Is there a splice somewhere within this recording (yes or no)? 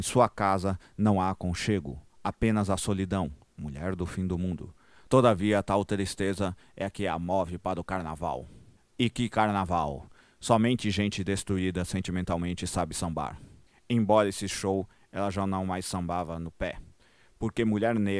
no